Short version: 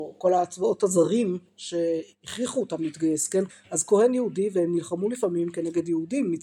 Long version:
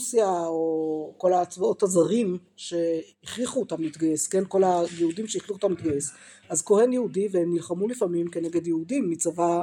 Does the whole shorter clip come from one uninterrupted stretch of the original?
no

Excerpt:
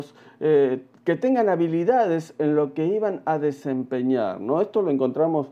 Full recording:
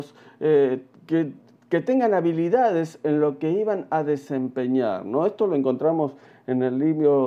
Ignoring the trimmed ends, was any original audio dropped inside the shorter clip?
yes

